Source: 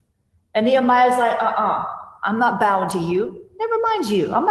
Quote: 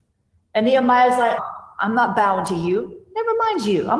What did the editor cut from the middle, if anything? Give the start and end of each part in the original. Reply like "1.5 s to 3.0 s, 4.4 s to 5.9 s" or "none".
1.4 s to 1.8 s